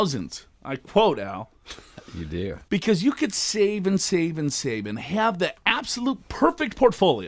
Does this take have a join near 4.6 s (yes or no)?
no